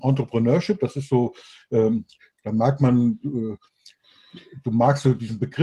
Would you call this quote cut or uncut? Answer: uncut